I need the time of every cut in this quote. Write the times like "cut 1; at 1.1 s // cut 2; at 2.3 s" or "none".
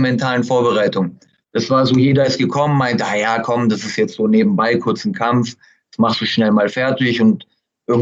cut 1; at 1.4 s